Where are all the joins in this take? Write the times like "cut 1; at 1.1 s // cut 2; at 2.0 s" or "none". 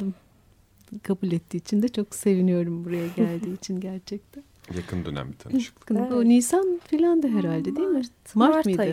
cut 1; at 5.9 s